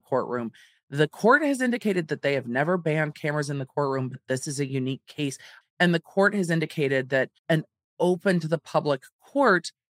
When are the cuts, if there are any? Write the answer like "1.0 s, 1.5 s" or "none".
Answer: 5.6 s, 7.4 s